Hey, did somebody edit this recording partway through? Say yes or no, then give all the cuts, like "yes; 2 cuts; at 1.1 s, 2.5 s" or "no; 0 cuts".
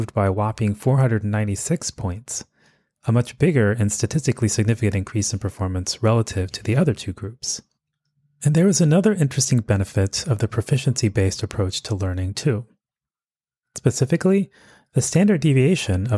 no; 0 cuts